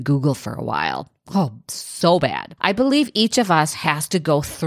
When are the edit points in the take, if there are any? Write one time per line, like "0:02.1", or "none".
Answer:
0:02.6